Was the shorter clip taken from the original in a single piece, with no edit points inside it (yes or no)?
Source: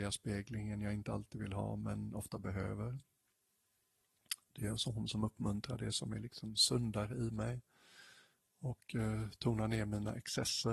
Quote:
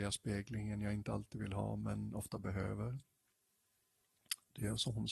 yes